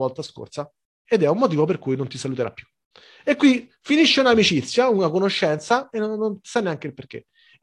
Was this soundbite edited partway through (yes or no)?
no